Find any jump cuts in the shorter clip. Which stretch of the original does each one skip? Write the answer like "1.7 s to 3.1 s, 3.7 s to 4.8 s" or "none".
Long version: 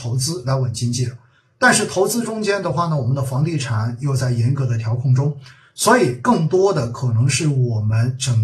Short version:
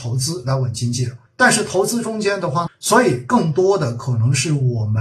1.3 s to 1.5 s, 2.9 s to 5.6 s